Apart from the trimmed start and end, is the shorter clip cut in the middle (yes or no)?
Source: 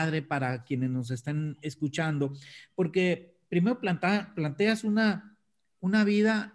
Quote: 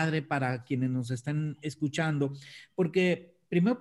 no